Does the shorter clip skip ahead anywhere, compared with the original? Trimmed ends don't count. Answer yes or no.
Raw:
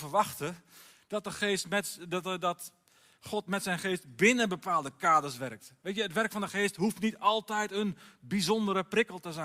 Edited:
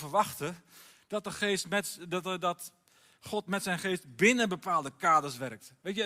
no